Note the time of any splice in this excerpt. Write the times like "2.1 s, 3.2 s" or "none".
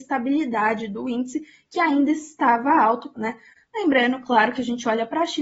3.1 s